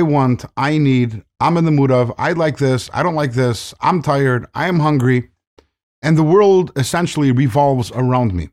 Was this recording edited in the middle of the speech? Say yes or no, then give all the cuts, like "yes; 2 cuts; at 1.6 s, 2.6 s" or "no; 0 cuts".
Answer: no; 0 cuts